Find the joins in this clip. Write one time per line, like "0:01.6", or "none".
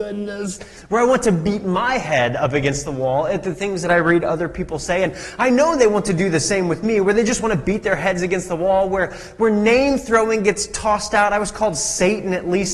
none